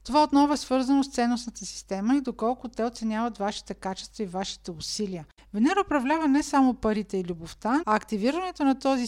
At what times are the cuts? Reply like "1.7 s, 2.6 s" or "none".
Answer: 5.4 s, 7.8 s